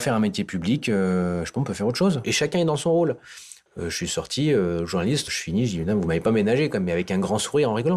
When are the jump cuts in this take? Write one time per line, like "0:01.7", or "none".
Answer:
0:02.2
0:03.7
0:05.3